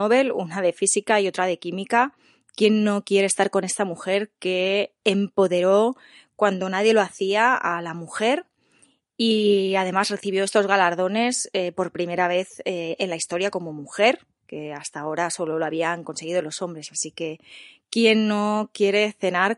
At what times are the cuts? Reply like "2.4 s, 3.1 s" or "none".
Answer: none